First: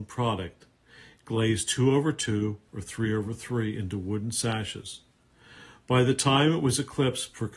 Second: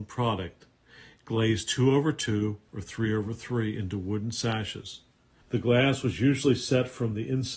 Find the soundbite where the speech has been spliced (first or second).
second